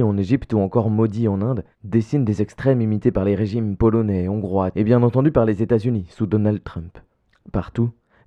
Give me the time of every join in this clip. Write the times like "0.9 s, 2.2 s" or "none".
4.7 s